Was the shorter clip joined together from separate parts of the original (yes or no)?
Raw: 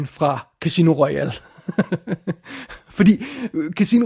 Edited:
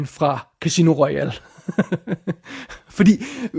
no